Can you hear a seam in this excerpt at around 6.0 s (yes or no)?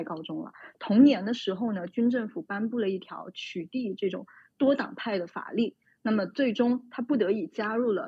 no